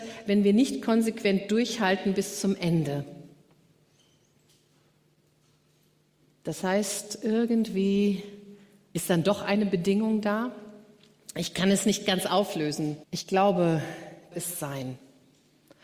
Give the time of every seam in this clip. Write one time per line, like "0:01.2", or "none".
0:13.0
0:14.3